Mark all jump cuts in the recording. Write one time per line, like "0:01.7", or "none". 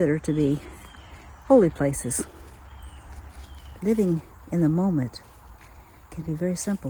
0:03.8

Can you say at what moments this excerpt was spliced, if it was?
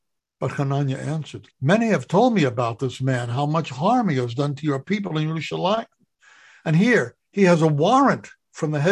0:01.5

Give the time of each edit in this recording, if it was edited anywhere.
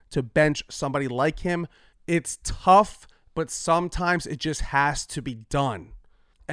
none

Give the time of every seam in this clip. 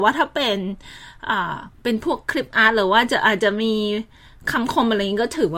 0:01.7

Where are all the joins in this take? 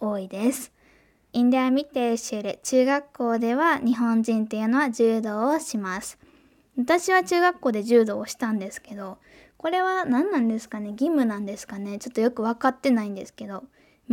0:01.3

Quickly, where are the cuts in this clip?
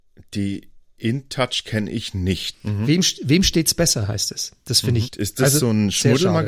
0:02.5
0:05.1

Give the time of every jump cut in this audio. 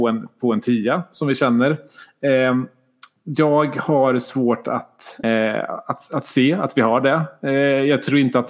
0:05.2

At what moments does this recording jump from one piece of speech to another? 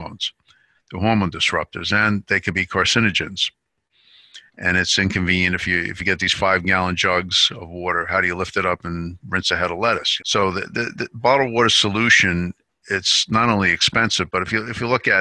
0:04.5
0:10.2

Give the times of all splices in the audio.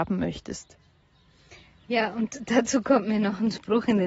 none

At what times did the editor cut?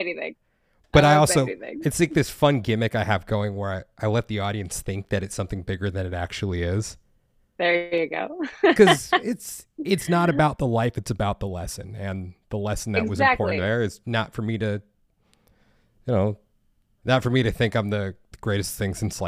none

